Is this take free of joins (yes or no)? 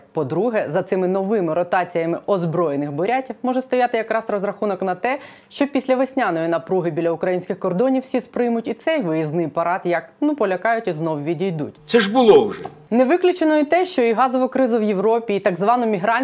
no